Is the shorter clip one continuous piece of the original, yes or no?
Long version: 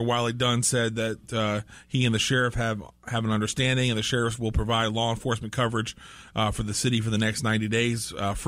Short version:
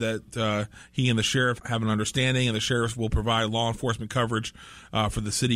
no